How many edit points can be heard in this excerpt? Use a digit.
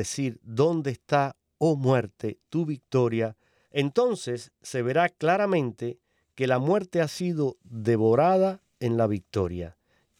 2